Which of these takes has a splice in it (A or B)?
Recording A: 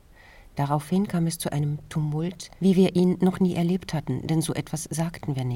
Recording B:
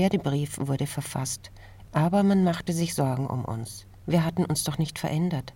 B